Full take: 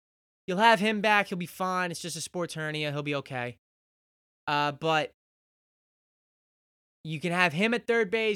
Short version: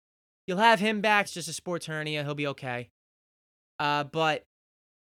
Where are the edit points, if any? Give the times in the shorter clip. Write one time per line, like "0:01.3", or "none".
0:01.2